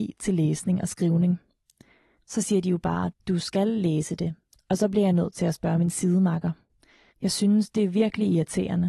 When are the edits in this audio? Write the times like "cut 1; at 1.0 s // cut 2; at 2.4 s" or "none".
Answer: cut 1; at 2.2 s // cut 2; at 4.5 s // cut 3; at 7.1 s